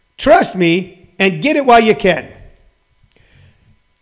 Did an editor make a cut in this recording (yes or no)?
no